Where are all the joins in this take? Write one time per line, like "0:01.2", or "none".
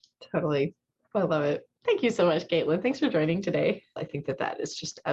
0:01.8
0:04.0